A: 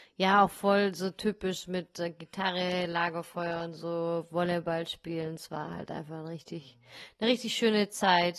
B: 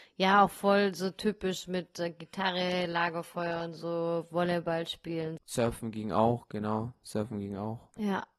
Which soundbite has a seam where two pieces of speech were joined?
B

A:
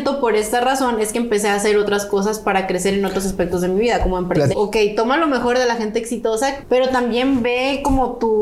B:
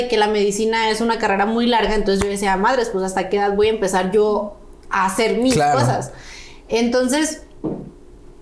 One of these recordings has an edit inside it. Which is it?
A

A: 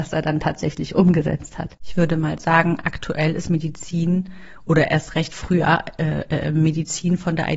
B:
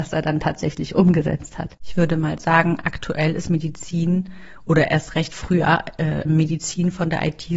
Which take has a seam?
B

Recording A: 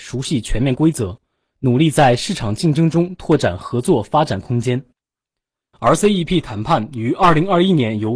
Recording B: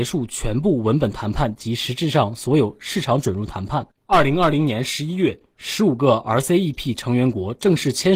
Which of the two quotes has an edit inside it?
B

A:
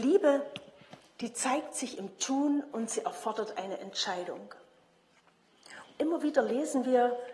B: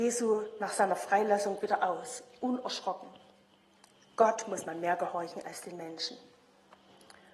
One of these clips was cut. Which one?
A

